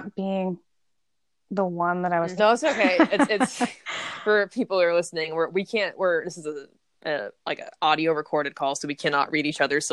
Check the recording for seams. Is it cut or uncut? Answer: cut